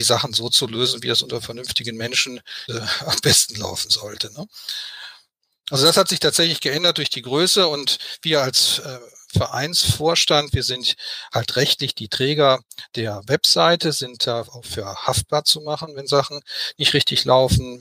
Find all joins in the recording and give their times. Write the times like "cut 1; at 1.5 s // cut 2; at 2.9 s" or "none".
cut 1; at 2.7 s

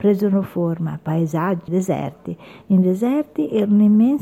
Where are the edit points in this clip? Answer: cut 1; at 1.7 s

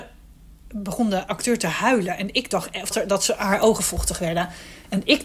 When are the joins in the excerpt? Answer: cut 1; at 2.9 s

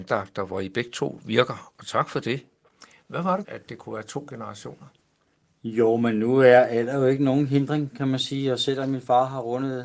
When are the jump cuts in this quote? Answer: cut 1; at 3.4 s

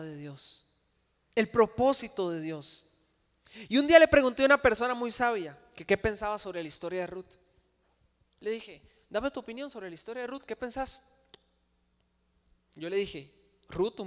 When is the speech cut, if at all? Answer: none

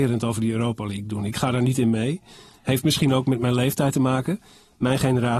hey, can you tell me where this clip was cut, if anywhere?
none

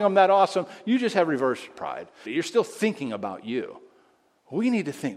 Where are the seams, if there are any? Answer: cut 1; at 2.2 s

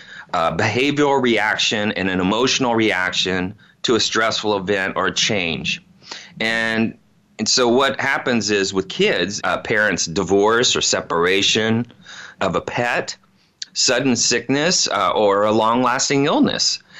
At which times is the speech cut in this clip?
cut 1; at 9.4 s // cut 2; at 12.4 s // cut 3; at 13.7 s

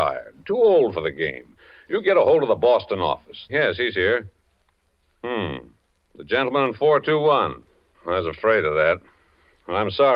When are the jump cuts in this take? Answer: cut 1; at 3.5 s // cut 2; at 7.9 s

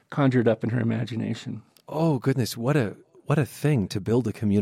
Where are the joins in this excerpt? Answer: none

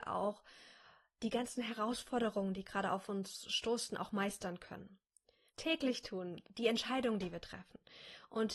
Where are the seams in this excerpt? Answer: cut 1; at 5.5 s

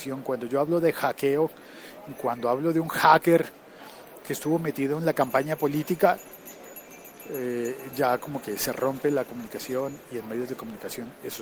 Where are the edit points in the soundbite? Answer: cut 1; at 4.2 s

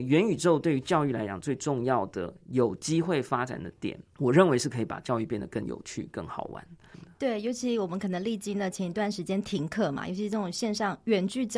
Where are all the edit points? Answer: cut 1; at 4.1 s

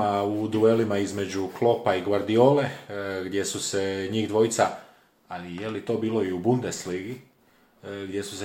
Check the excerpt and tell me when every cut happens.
none

